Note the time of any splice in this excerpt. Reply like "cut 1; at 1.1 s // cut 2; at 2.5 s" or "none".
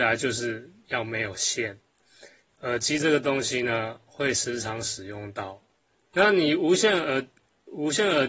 cut 1; at 6.1 s